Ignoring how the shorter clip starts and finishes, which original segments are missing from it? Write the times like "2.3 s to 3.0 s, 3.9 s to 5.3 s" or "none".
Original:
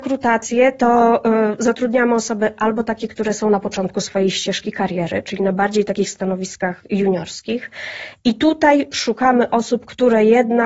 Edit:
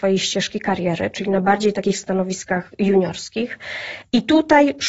none